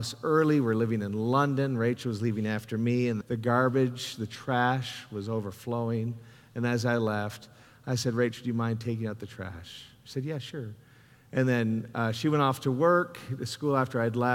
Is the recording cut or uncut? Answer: cut